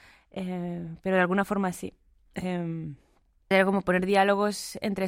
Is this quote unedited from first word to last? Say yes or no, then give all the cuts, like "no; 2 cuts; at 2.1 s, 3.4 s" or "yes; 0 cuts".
no; 1 cut; at 3.5 s